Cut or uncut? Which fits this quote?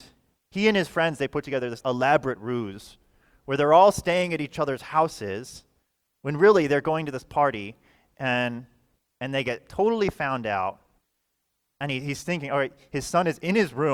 cut